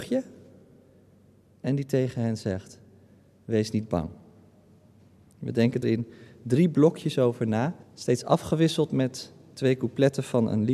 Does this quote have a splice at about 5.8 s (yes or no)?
yes